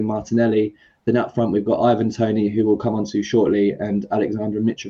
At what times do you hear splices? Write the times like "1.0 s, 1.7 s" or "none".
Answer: none